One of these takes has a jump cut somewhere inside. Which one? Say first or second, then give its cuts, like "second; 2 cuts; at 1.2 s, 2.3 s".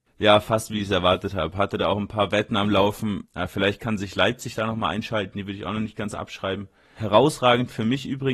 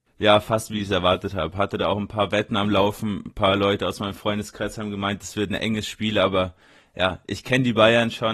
first; 2 cuts; at 3.2 s, 7.0 s